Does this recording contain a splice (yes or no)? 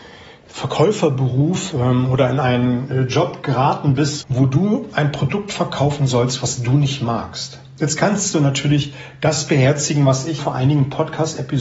yes